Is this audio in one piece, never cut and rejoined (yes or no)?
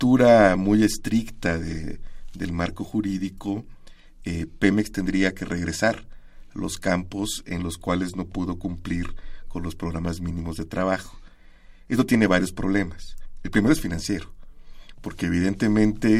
yes